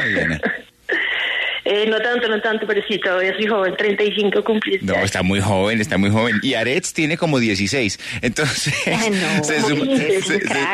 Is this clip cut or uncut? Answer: uncut